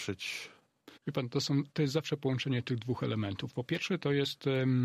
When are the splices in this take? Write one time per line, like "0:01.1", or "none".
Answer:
0:01.0